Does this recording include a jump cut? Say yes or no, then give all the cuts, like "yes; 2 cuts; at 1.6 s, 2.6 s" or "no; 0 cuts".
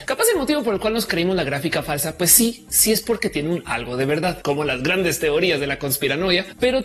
no; 0 cuts